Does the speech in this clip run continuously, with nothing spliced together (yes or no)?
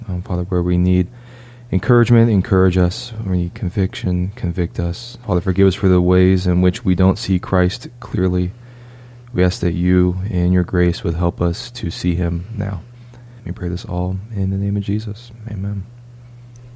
no